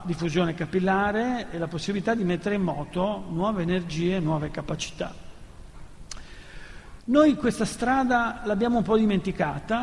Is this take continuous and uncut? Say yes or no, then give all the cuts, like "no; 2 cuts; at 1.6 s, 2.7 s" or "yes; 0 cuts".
no; 1 cut; at 7.0 s